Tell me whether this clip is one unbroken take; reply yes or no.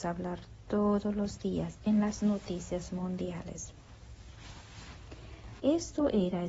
no